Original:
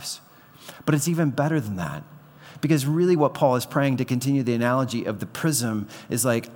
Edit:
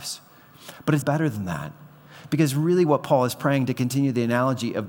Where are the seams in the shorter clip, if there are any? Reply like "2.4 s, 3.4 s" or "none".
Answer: 1.0 s